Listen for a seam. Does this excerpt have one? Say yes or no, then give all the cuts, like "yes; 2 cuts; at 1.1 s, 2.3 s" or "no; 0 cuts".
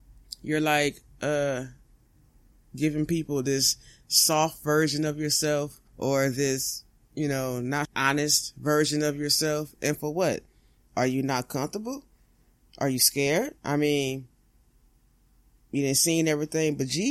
yes; 3 cuts; at 5.9 s, 7.9 s, 13.6 s